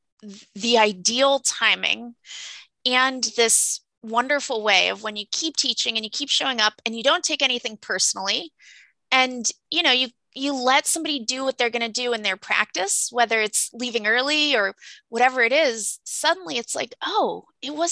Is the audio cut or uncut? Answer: uncut